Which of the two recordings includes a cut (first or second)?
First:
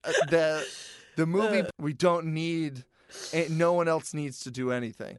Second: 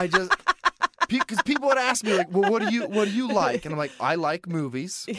first